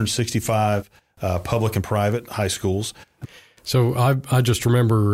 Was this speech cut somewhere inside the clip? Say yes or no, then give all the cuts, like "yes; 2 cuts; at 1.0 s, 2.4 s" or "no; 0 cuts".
yes; 1 cut; at 3.2 s